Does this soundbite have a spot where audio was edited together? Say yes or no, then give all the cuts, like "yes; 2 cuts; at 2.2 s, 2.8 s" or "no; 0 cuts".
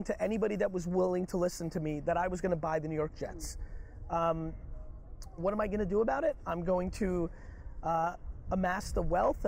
yes; 1 cut; at 5.4 s